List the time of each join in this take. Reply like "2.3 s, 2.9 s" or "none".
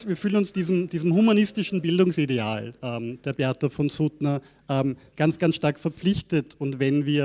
none

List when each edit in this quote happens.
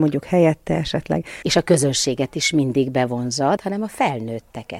1.4 s, 3.6 s

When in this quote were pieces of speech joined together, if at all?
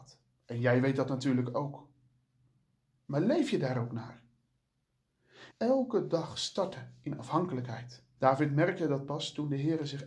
5.5 s, 8.2 s

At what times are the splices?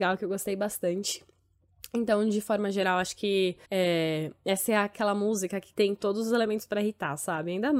3.6 s, 5.7 s

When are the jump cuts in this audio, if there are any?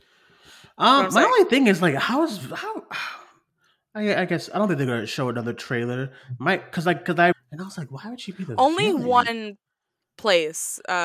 7.3 s

